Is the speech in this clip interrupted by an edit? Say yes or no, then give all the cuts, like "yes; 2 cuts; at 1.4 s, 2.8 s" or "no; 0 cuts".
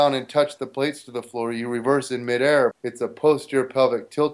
yes; 1 cut; at 2.7 s